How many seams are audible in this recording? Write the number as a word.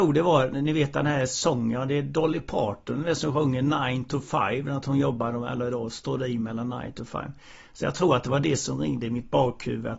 zero